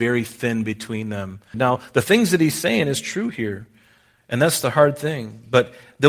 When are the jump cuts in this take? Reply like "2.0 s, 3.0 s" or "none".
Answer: 1.5 s